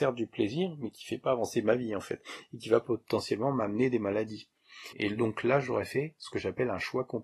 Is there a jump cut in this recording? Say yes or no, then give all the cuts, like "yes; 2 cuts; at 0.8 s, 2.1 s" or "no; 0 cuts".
yes; 1 cut; at 4.9 s